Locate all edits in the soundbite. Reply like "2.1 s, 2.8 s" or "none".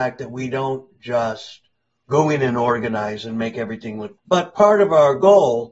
4.2 s